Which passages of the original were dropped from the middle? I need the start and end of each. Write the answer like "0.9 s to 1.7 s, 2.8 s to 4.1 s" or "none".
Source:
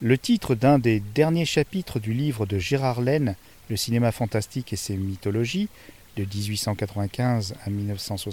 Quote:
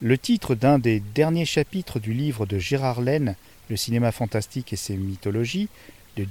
none